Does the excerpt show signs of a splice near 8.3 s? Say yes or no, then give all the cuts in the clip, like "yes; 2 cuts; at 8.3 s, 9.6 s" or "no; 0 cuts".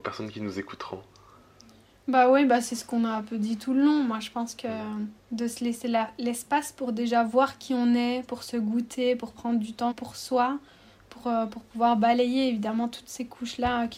no; 2 cuts; at 5.2 s, 9.9 s